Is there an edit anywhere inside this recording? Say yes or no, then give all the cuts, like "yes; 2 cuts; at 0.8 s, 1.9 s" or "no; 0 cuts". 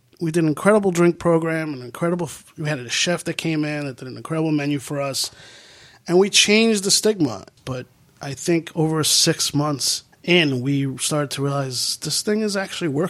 yes; 2 cuts; at 7.6 s, 10.1 s